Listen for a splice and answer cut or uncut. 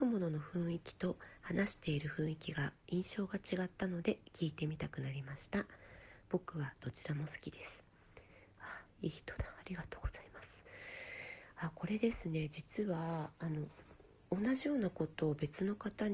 uncut